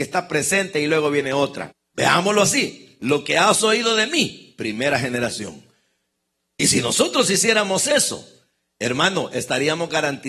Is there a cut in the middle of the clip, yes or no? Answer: yes